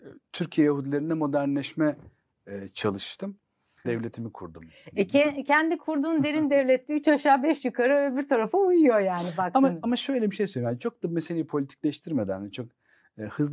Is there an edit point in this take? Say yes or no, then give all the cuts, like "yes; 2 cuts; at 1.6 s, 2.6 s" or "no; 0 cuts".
yes; 1 cut; at 3.8 s